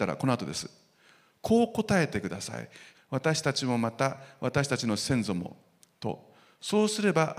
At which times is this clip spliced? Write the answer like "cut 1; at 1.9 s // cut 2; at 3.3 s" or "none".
cut 1; at 2.9 s

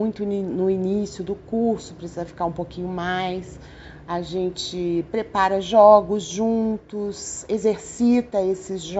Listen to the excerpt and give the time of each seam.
none

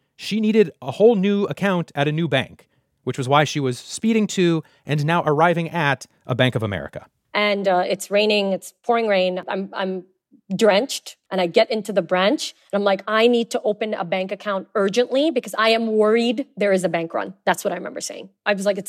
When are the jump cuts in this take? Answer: none

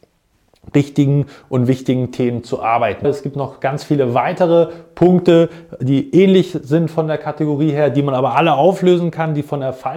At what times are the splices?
cut 1; at 3.0 s

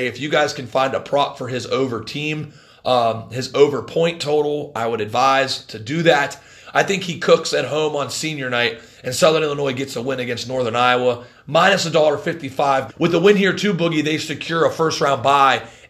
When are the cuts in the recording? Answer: cut 1; at 12.9 s

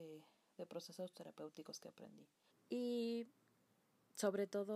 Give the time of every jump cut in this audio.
cut 1; at 2.5 s

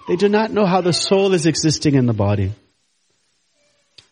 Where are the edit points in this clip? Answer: none

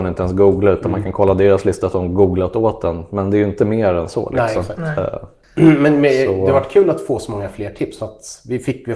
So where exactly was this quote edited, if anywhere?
none

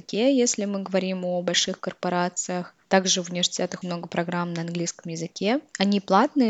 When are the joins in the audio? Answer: cut 1; at 3.8 s

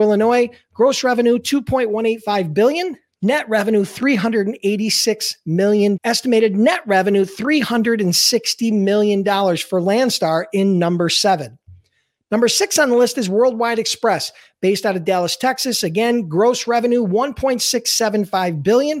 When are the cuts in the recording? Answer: cut 1; at 6.0 s

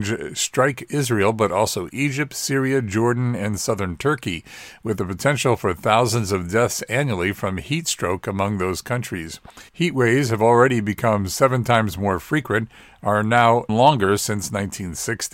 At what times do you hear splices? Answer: cut 1; at 9.7 s // cut 2; at 13.7 s

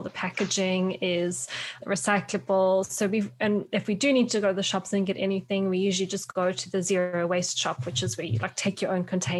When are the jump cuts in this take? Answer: none

